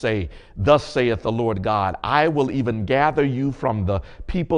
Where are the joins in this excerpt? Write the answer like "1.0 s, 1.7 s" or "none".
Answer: none